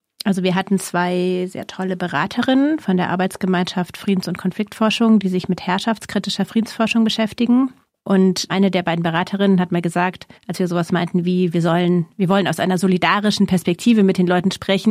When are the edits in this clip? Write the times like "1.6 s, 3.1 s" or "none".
10.4 s